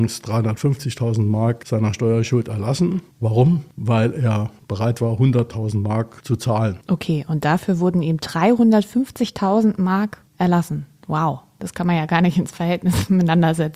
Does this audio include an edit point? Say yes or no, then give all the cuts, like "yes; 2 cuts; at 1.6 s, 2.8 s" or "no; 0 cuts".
no; 0 cuts